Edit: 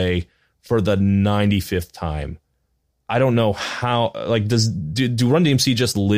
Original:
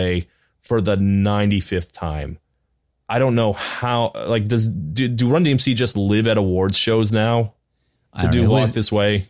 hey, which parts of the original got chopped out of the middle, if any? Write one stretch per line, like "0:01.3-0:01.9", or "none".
none